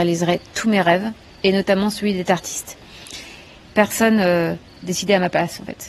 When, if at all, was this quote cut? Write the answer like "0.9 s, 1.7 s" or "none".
4.8 s